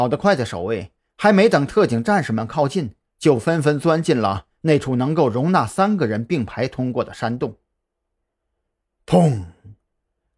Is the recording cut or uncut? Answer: uncut